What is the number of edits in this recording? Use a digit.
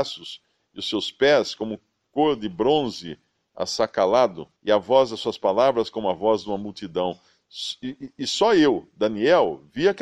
1